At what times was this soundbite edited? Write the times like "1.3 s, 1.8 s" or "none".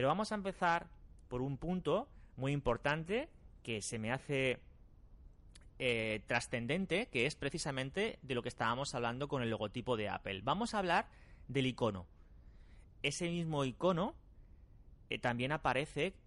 12.9 s